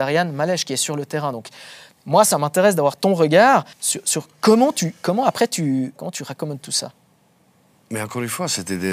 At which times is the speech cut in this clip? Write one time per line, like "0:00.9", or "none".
0:03.7
0:06.0